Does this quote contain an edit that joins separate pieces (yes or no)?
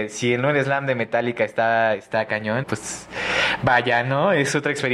yes